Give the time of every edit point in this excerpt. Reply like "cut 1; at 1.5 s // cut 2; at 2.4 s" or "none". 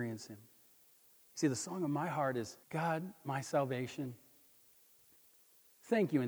cut 1; at 1.1 s // cut 2; at 2.6 s

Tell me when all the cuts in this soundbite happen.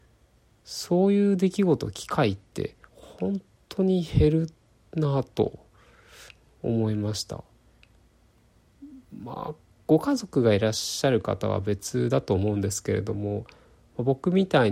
cut 1; at 2.9 s

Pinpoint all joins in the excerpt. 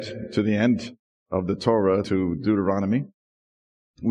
cut 1; at 2.0 s

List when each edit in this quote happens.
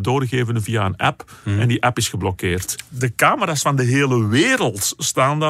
cut 1; at 2.8 s

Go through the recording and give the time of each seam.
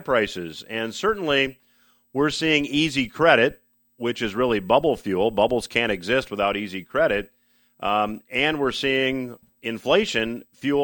none

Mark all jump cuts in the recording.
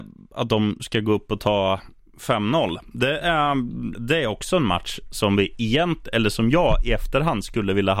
cut 1; at 3.9 s

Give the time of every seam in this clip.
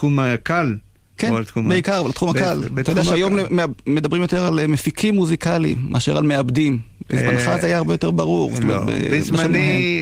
none

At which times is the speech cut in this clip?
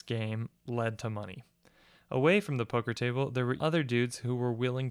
cut 1; at 3.6 s

